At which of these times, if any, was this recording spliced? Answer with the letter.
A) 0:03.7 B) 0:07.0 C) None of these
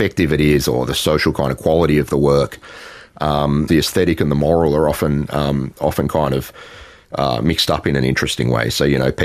A